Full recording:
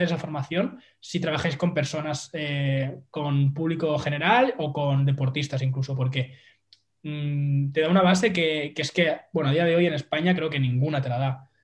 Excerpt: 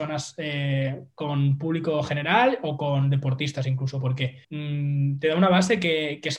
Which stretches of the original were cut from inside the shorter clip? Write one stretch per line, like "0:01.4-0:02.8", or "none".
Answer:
0:06.4-0:07.0